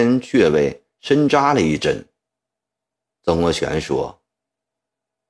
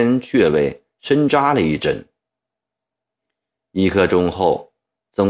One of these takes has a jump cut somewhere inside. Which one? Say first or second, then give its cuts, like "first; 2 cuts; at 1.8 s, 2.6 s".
first; 1 cut; at 3.2 s